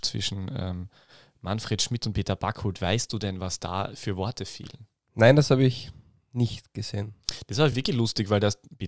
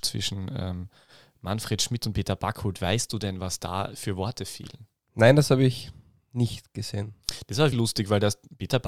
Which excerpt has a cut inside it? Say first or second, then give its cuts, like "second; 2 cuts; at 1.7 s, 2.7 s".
second; 1 cut; at 7.7 s